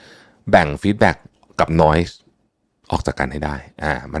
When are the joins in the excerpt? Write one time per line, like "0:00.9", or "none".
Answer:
none